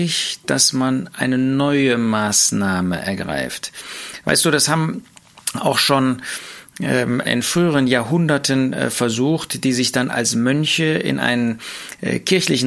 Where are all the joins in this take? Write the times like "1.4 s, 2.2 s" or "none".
7.2 s